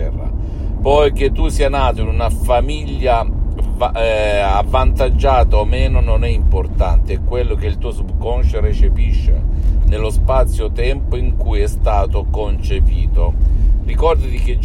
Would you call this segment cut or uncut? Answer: uncut